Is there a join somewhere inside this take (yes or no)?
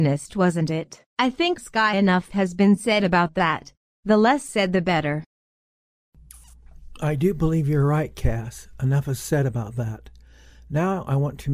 yes